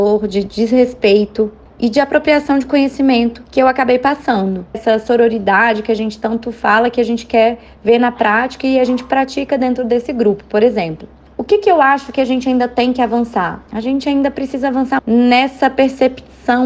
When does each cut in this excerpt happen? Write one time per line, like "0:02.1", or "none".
0:04.7
0:15.0